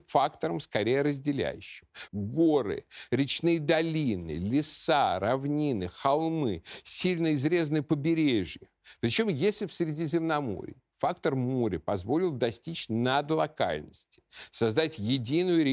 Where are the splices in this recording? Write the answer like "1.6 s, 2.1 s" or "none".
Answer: 2.1 s